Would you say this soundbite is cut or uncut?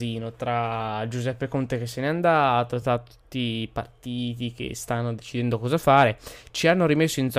uncut